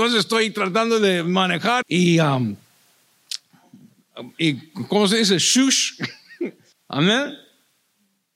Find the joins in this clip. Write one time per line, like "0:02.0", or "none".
0:01.8
0:06.7

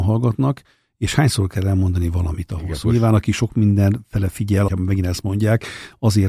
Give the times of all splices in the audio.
0:02.8
0:04.7

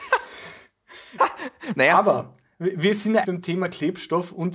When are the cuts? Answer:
0:01.2
0:03.2

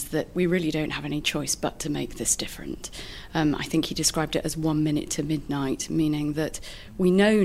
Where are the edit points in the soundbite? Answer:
none

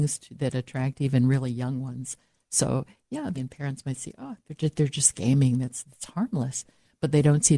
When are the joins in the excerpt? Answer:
0:03.3

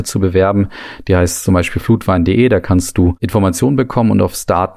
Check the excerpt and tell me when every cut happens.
none

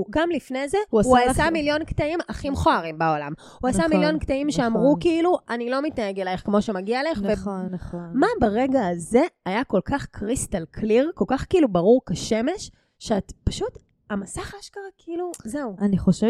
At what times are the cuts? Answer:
0:07.7

